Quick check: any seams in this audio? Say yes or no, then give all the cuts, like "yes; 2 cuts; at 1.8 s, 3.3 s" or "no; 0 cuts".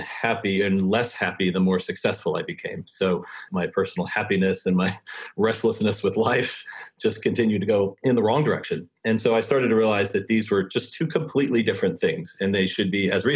yes; 1 cut; at 3.5 s